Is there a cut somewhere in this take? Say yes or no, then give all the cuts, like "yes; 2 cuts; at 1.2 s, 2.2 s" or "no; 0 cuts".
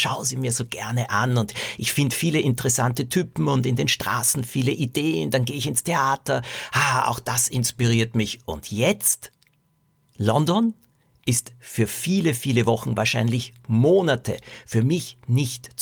yes; 1 cut; at 10.0 s